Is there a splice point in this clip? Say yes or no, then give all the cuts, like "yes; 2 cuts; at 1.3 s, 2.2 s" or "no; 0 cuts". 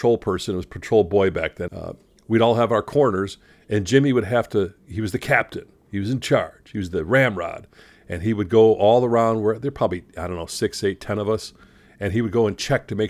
yes; 1 cut; at 1.7 s